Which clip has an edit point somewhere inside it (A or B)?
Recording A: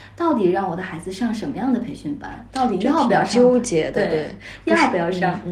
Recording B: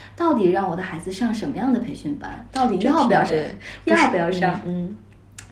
B